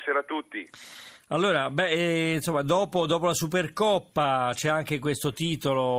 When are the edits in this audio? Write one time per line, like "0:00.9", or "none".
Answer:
none